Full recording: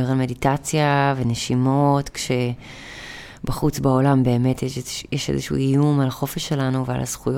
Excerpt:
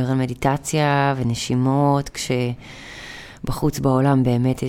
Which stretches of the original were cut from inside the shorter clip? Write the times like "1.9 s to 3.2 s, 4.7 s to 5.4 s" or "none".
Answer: none

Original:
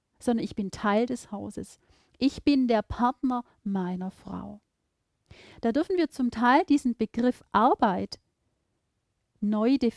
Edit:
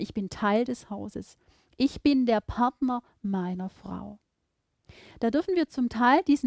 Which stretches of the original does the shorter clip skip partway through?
none

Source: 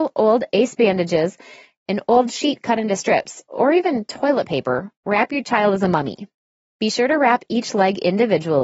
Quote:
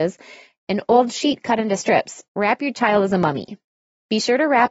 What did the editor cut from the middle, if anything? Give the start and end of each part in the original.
3.5 s to 5.0 s

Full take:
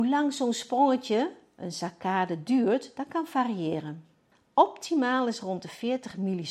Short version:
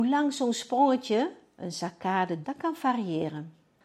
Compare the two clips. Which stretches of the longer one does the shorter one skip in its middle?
2.4 s to 2.9 s

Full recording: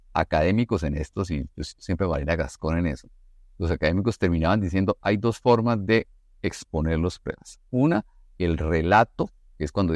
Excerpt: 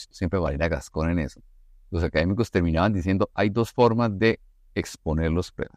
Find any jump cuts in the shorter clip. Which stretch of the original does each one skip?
none

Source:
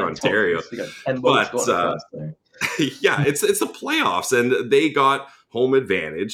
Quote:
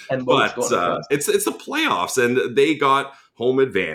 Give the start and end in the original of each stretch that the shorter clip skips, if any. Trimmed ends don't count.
2.1 s to 3.2 s

